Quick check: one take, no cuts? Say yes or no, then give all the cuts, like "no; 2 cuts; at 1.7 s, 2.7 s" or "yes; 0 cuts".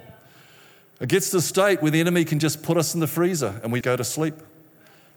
no; 1 cut; at 3.8 s